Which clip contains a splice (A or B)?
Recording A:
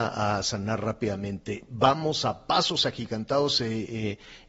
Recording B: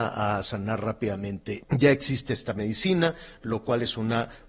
B